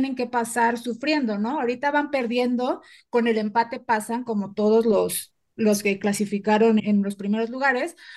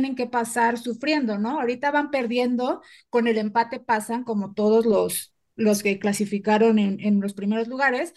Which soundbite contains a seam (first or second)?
first